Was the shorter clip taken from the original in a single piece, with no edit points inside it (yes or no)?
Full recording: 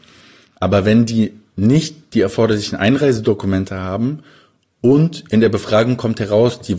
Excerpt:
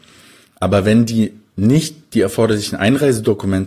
yes